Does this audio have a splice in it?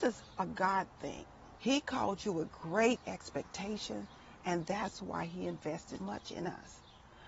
yes; 2 cuts; at 1.6 s, 6.0 s

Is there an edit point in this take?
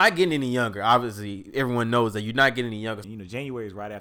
yes; 1 cut; at 3.0 s

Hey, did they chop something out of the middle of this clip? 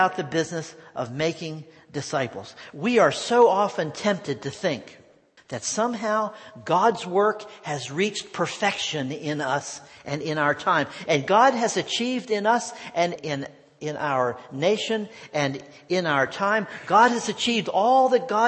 yes; 3 cuts; at 5.4 s, 11.1 s, 13.2 s

